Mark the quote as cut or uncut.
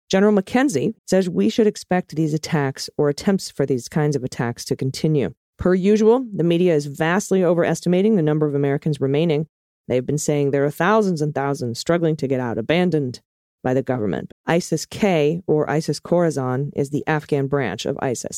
cut